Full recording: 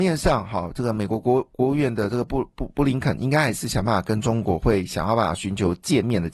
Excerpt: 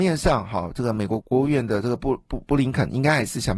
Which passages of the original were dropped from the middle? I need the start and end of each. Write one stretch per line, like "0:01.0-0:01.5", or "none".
0:01.2-0:01.5